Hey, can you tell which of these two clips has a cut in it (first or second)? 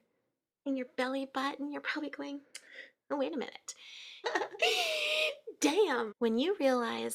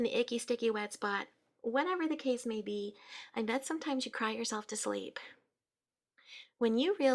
first